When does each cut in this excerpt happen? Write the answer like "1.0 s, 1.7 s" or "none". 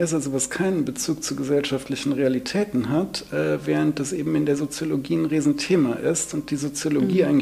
none